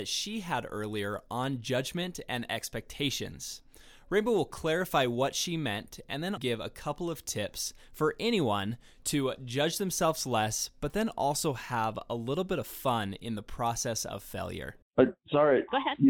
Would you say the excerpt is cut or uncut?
cut